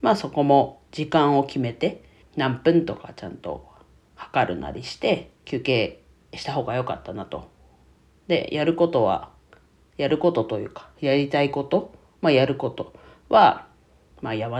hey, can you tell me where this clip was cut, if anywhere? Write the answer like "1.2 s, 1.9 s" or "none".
2.2 s, 5.3 s

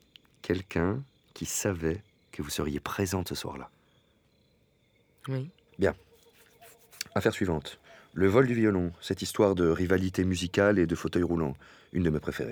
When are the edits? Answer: 5.7 s

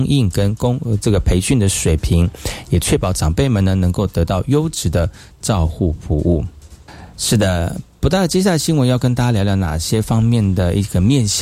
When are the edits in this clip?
none

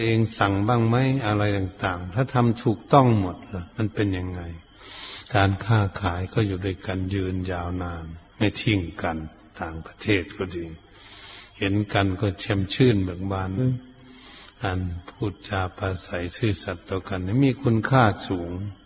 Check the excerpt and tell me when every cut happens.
13.6 s

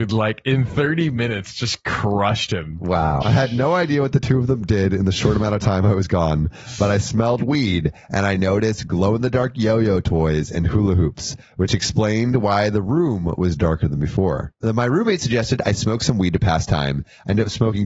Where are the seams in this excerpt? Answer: 3.2 s

